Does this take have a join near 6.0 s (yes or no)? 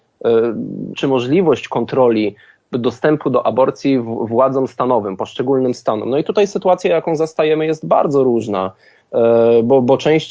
no